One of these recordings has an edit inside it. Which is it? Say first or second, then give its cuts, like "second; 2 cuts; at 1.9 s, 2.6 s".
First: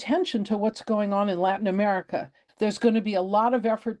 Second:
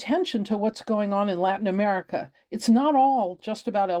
first; 1 cut; at 2.5 s